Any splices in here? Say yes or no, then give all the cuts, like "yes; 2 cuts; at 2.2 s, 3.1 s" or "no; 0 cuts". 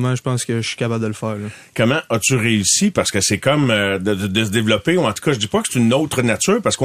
no; 0 cuts